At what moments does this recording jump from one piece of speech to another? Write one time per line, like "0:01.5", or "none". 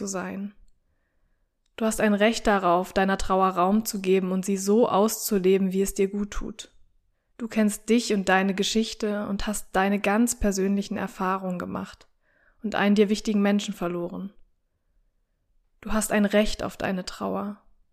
0:07.3